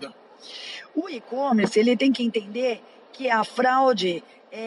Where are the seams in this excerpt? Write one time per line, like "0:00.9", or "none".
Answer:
none